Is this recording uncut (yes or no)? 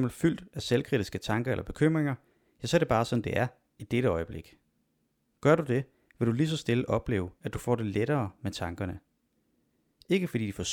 yes